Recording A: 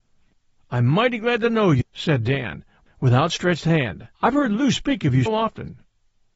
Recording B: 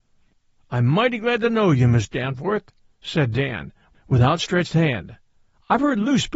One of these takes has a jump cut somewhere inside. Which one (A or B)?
A